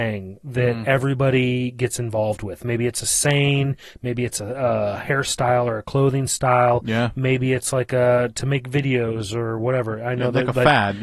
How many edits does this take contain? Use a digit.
0